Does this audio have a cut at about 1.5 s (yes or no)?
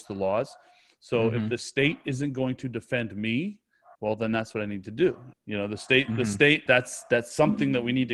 no